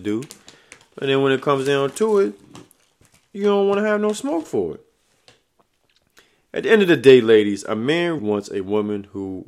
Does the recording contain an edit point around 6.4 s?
no; 1 cut; at 8.2 s

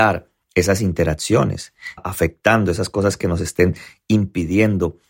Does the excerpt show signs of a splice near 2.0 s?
yes; 1 cut; at 2.0 s

